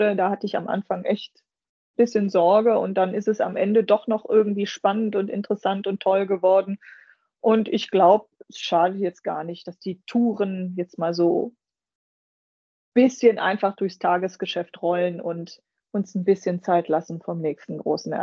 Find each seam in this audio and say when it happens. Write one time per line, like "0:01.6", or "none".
none